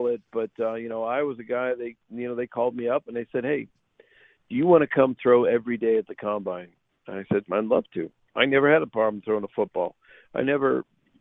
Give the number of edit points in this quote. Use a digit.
1